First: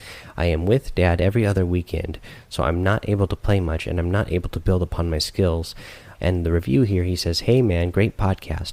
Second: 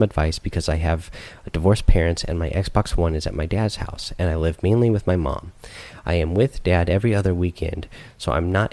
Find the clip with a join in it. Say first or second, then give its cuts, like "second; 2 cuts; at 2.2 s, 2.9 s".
first; 1 cut; at 6.1 s